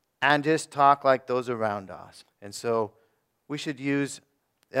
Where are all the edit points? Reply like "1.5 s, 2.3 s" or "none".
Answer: 2.2 s